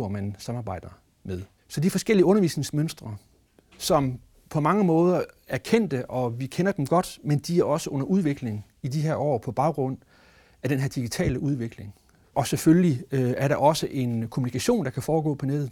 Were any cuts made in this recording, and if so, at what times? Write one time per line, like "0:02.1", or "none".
0:12.3